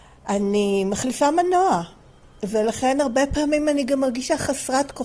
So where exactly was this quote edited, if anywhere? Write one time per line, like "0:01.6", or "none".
none